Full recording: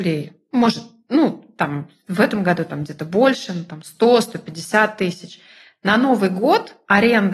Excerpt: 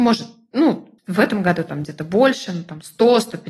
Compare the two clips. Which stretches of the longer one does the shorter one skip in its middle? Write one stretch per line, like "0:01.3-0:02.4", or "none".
0:01.5-0:02.0